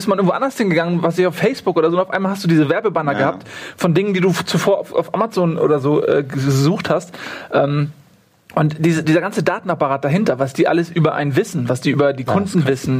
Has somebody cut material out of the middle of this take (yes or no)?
no